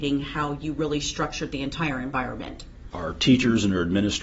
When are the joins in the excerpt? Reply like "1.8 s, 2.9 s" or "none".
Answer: 2.9 s